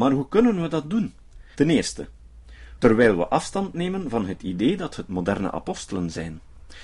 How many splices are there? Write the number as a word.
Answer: two